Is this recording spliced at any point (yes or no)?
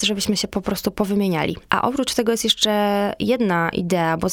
no